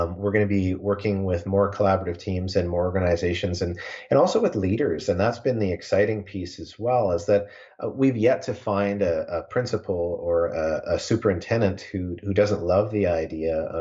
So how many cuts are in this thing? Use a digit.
0